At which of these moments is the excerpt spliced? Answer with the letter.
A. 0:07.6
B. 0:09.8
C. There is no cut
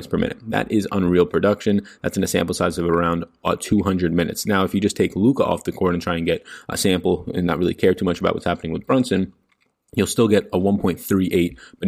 C